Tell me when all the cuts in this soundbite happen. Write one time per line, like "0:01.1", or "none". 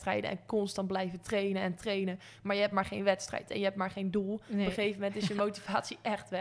none

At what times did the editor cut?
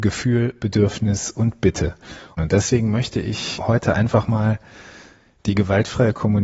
0:02.4
0:03.6

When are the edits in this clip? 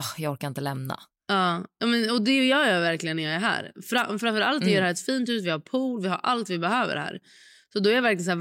none

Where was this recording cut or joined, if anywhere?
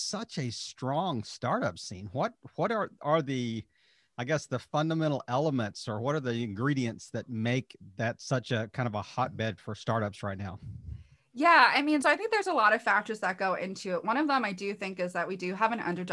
0:09.6
0:12.0

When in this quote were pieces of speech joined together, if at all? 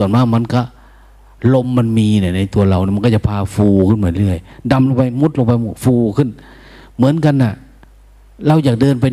none

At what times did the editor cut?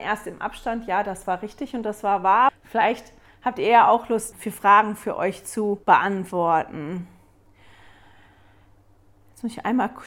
0:02.5
0:04.3
0:05.8

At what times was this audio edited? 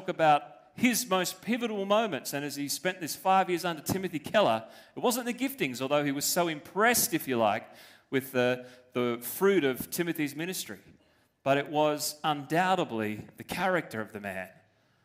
none

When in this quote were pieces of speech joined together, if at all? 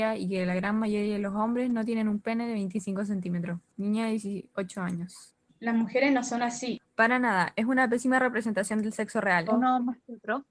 0:05.5
0:06.8
0:09.5

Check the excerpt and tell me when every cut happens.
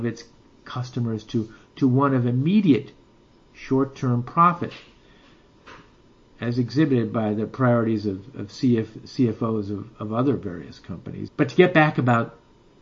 0:11.3

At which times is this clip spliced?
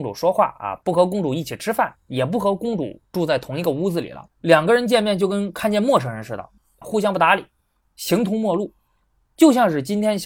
0:04.3

